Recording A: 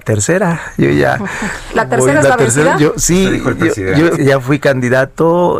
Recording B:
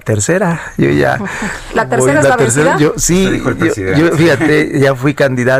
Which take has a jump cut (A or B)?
A